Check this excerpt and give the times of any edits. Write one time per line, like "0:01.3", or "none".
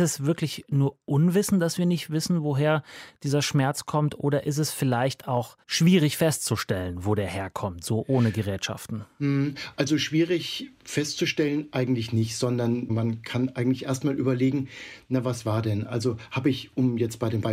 0:05.6